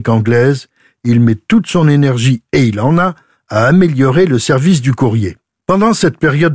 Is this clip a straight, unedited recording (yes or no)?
no